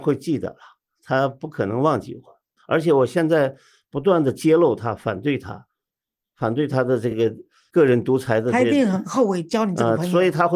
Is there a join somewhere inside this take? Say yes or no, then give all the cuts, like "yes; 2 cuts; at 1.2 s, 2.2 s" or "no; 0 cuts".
no; 0 cuts